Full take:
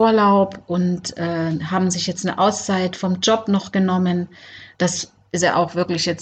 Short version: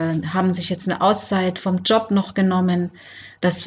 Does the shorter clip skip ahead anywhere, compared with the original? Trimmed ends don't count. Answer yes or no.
no